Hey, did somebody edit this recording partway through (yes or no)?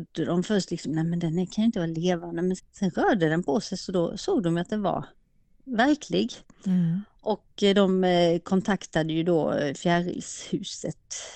yes